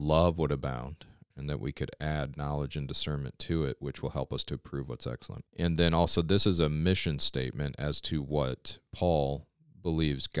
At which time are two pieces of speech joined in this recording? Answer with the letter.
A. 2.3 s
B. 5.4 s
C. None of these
B